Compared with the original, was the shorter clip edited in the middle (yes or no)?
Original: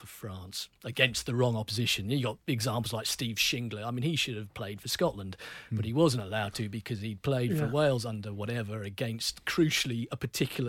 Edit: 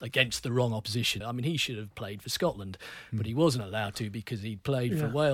yes